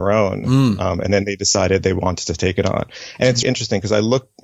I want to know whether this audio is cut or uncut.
cut